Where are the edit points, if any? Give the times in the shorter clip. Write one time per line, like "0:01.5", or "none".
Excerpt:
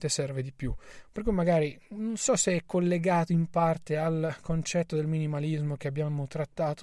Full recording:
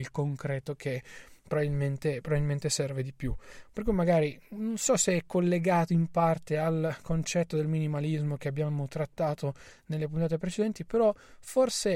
none

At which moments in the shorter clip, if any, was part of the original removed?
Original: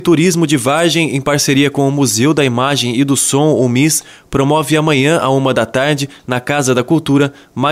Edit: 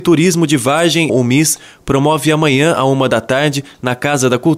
0:01.1

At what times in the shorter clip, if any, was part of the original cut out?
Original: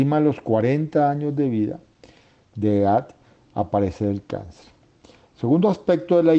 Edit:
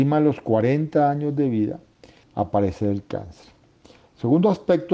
0:02.2

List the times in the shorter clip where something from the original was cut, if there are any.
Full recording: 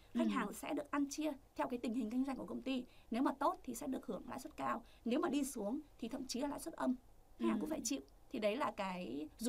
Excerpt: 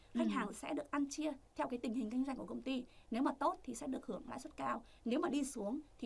none

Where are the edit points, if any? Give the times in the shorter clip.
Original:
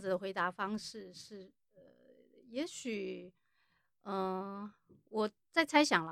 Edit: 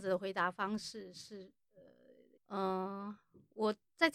0:02.4

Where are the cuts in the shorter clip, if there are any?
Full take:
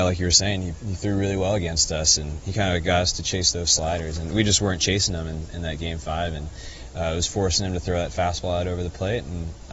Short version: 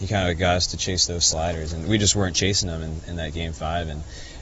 none

